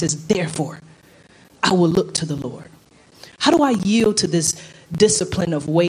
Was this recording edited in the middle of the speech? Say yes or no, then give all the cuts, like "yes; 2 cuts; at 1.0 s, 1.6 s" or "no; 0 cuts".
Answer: no; 0 cuts